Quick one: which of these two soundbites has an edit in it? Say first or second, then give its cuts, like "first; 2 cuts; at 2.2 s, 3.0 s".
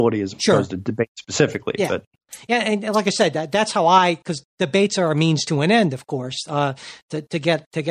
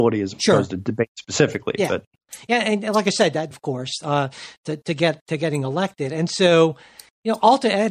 second; 1 cut; at 3.5 s